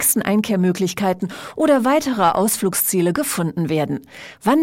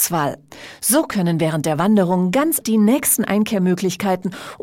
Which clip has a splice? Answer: second; 1 cut; at 2.6 s

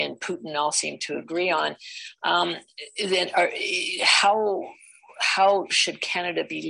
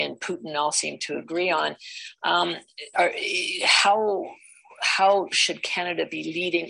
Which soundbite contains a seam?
second; 1 cut; at 2.9 s

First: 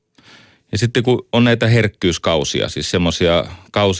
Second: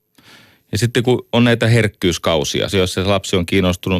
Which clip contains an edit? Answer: second; 1 cut; at 2.7 s

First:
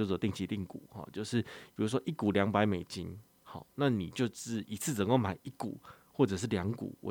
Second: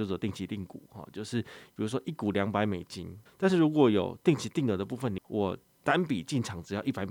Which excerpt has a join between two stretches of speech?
second; 2 cuts; at 3.3 s, 5.2 s

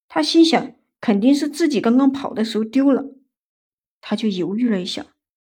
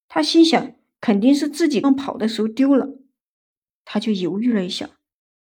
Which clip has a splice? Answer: second; 1 cut; at 1.8 s

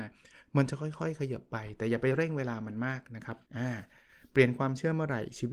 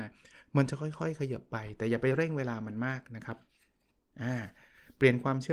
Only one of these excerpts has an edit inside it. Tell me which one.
first; 1 cut; at 3.5 s

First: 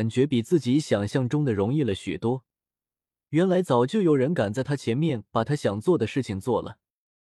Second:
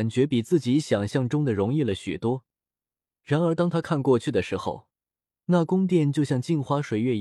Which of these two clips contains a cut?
second; 1 cut; at 3.1 s

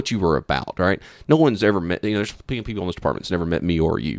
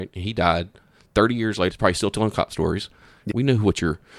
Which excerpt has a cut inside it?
second; 2 cuts; at 1.7 s, 3.3 s

